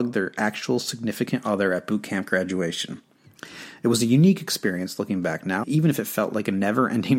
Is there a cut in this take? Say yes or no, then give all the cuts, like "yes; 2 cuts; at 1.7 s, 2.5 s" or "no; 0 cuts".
yes; 1 cut; at 5.6 s